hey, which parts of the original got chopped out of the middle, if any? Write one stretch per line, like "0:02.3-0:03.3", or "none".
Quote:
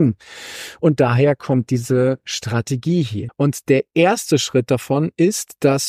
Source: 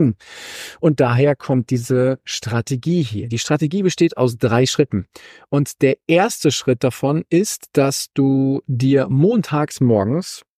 0:03.3-0:05.4

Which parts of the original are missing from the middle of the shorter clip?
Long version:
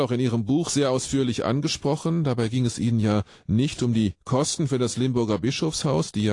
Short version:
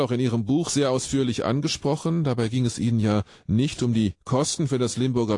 none

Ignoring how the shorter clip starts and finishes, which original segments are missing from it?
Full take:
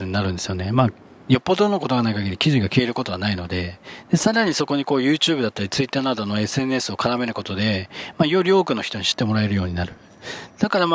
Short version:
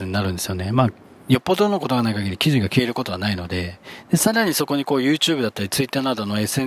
none

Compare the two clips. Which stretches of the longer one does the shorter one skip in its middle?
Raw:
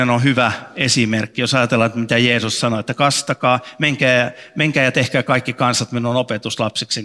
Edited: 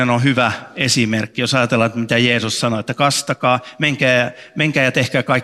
none

